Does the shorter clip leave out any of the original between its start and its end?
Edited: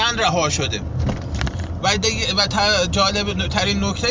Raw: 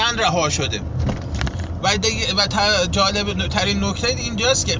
no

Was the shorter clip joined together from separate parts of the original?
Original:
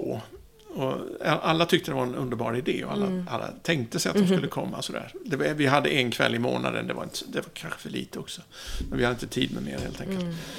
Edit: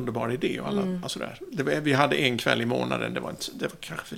yes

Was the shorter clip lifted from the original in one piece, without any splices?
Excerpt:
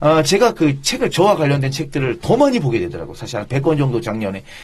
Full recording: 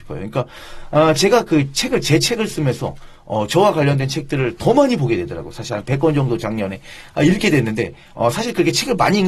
no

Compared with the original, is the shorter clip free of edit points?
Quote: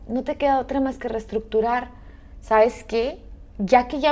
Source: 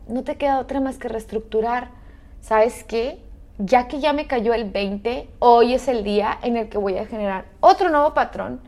yes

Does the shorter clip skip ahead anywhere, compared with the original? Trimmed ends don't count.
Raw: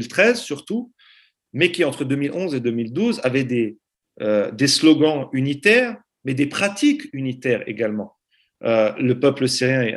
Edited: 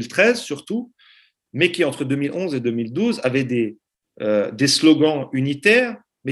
no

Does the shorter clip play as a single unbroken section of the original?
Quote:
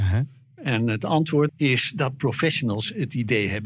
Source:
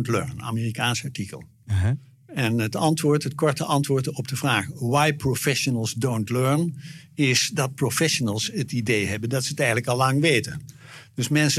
no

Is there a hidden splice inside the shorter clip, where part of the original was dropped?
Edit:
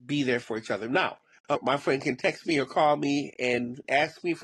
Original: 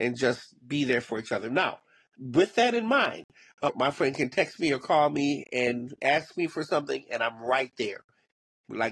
yes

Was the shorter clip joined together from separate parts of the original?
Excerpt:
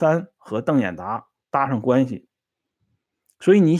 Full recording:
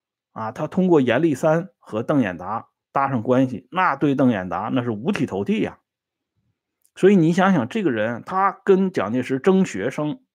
yes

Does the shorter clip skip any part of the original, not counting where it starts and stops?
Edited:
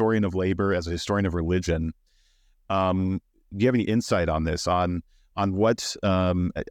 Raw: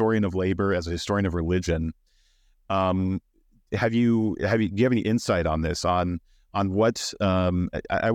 yes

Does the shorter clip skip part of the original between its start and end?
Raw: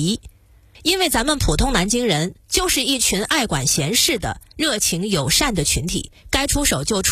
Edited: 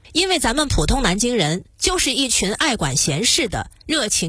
no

